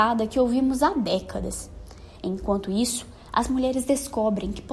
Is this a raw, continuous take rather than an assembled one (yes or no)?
yes